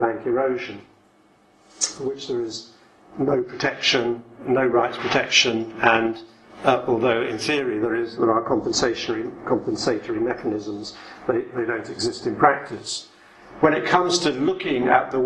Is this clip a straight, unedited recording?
yes; 0 cuts

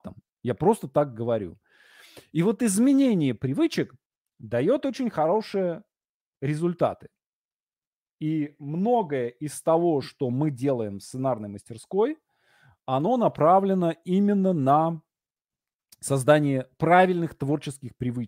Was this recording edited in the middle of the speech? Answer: no; 0 cuts

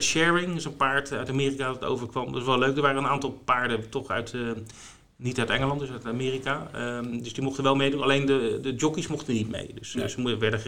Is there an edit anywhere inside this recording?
no; 0 cuts

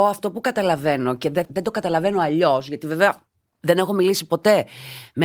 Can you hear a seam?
yes; 1 cut; at 1.5 s

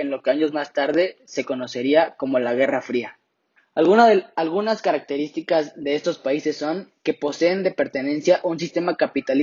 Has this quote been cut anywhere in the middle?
yes; 1 cut; at 3.6 s

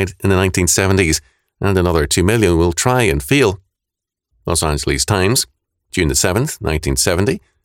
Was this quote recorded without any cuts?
no; 2 cuts; at 4.3 s, 5.9 s

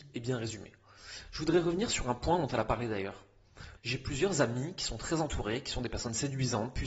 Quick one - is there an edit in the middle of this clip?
yes; 1 cut; at 3.8 s

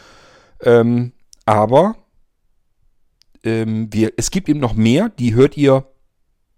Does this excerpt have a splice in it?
no; 0 cuts

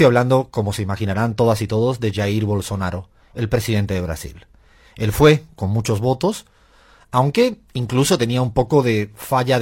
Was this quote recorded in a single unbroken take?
yes; 0 cuts

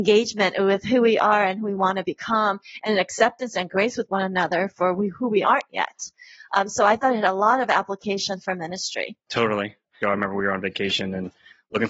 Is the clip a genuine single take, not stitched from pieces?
no; 1 cut; at 10.0 s

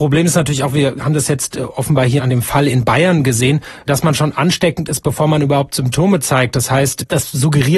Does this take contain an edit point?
no; 0 cuts

